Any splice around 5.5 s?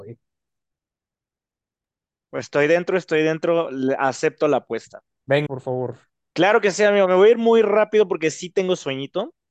yes; 1 cut; at 5.5 s

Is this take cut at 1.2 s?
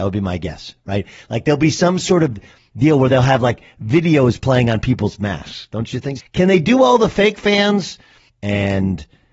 no; 2 cuts; at 6.2 s, 8.3 s

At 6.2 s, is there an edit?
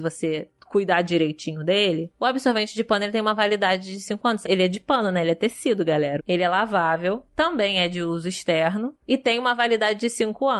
yes; 2 cuts; at 4.4 s, 6.2 s

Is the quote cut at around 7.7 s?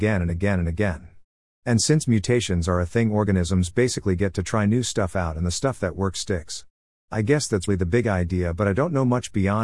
yes; 1 cut; at 7.7 s

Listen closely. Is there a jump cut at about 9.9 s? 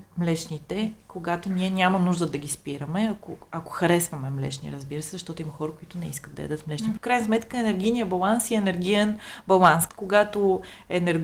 yes; 2 cuts; at 7.0 s, 9.9 s

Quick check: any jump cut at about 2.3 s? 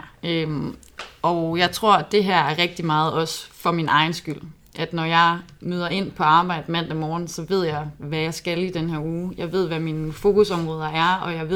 no; 0 cuts

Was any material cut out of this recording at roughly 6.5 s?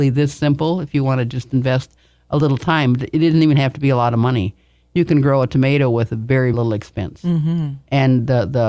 yes; 1 cut; at 6.5 s

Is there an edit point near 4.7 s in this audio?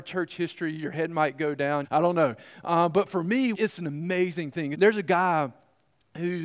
yes; 3 cuts; at 1.8 s, 3.5 s, 4.7 s

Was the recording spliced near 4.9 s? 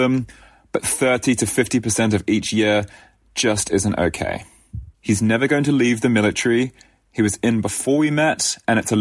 yes; 1 cut; at 4.9 s

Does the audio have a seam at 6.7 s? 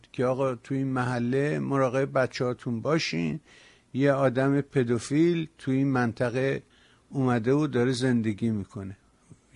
no; 0 cuts

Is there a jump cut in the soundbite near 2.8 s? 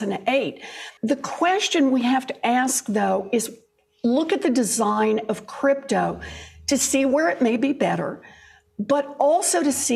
no; 1 cut; at 1.0 s

